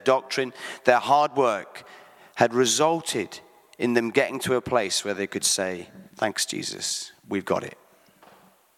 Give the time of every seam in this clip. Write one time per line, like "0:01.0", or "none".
0:06.1
0:07.2

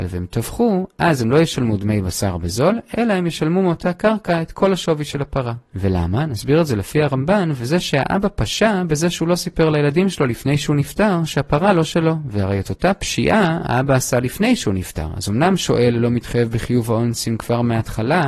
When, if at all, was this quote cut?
none

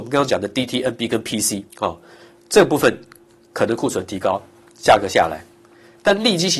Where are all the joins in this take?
0:01.7

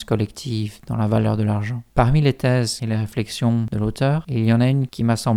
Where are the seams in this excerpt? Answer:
0:01.9

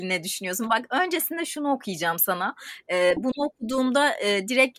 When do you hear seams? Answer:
0:03.2

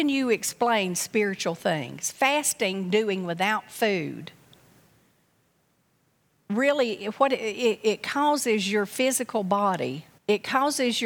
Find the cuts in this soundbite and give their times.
0:10.2

